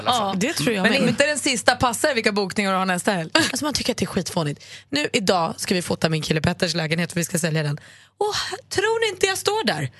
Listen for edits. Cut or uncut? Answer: cut